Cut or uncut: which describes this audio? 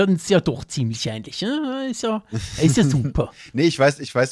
uncut